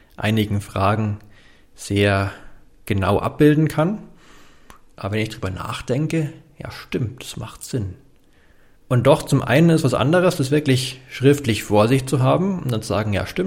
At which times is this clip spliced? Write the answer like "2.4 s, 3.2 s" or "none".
4.9 s, 8.7 s